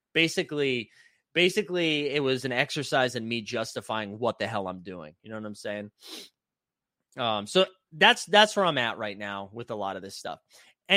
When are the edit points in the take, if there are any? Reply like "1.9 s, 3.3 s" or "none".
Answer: none